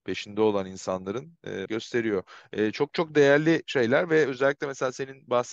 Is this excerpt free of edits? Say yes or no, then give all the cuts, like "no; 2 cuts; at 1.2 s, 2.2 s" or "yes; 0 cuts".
no; 1 cut; at 1.7 s